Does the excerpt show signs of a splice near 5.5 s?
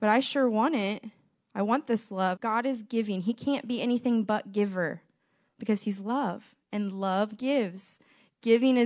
no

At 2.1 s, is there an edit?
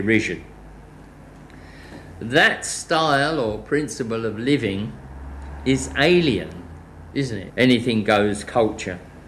no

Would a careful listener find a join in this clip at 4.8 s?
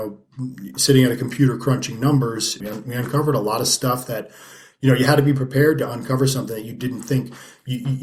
no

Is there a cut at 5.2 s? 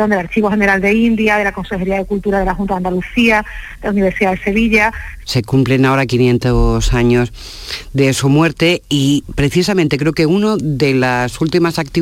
yes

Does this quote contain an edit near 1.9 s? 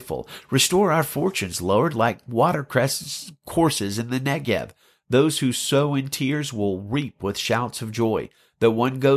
no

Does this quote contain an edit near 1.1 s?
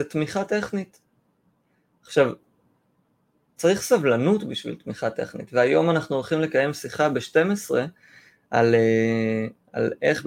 no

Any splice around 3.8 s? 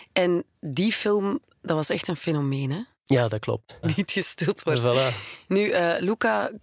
yes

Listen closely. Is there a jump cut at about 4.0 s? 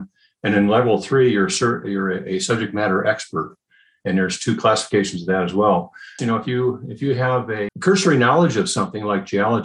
yes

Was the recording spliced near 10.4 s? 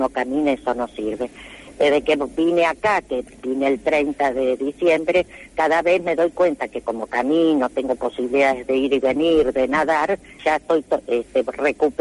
yes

